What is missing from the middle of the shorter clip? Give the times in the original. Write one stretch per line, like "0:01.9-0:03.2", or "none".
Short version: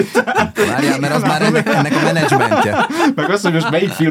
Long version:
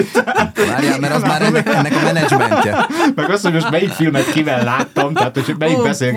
none